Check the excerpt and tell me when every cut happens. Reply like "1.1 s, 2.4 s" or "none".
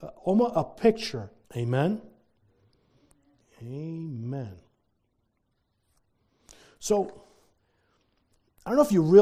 1.4 s